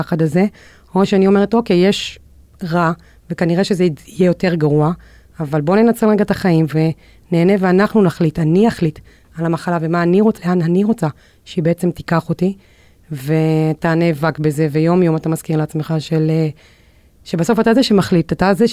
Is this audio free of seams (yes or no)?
no